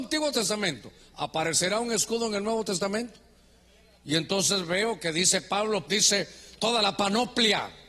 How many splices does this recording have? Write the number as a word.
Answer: one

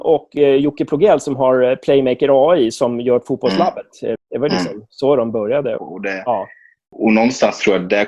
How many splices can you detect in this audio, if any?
two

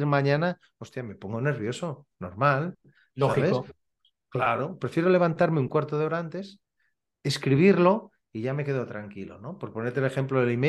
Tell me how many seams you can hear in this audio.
one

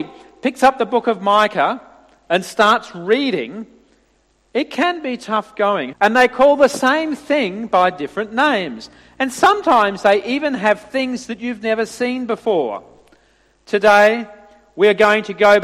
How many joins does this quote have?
one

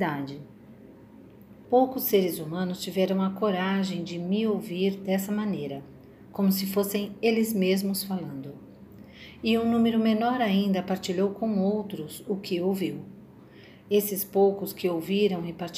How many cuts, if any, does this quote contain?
one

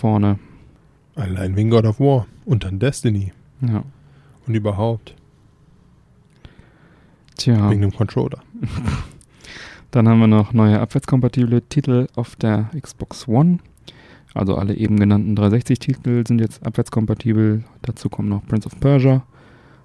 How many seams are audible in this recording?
one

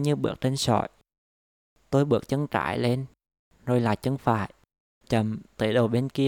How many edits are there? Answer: one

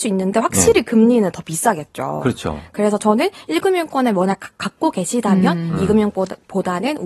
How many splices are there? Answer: zero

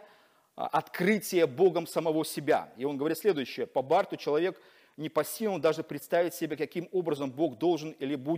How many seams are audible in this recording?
zero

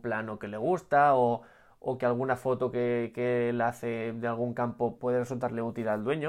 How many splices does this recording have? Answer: one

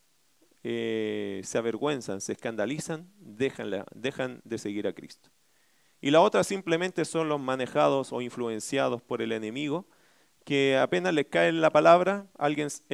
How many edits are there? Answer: zero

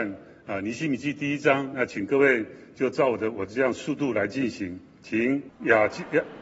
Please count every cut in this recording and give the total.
one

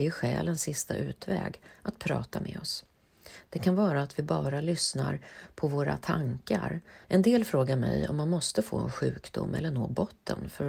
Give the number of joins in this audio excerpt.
two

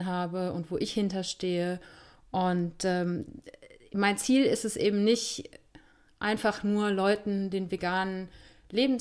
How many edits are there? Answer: one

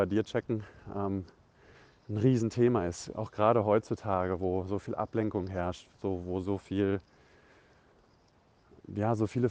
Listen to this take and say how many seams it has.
zero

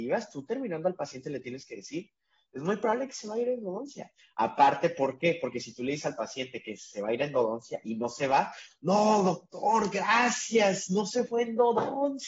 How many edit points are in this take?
zero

